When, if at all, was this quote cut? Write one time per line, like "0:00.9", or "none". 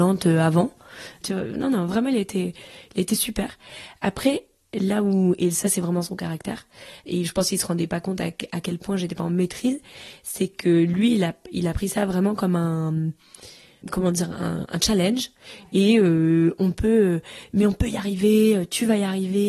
0:01.2